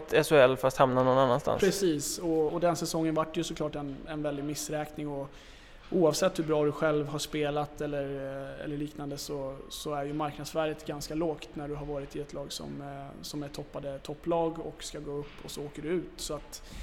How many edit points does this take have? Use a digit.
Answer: 1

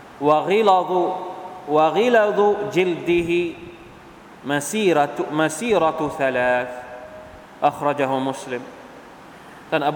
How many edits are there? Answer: 0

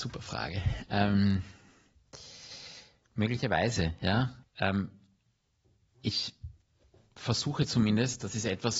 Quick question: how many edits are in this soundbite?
1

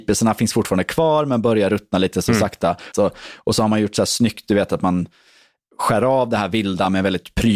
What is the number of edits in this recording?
1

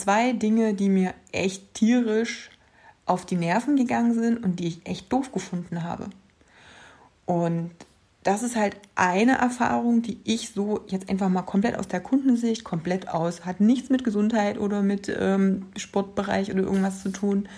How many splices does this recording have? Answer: 0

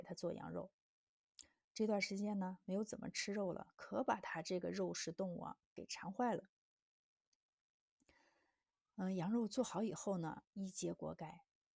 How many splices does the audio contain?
0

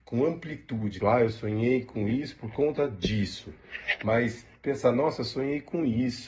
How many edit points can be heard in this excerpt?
1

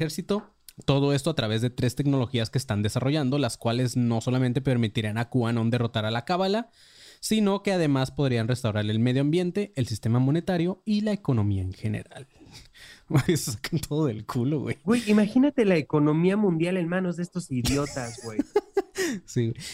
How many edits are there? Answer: 1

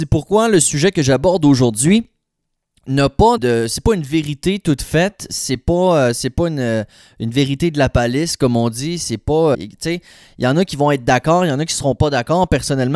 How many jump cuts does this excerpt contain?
2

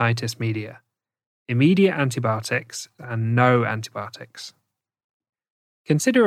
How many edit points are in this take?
1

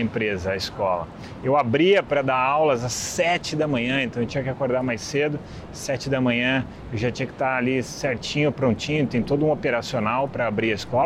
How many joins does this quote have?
0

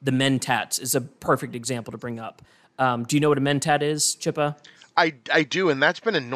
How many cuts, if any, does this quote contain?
0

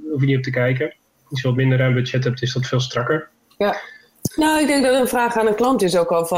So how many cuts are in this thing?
1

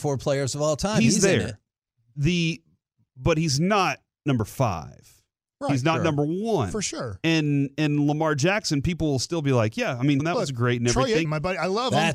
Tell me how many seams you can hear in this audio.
2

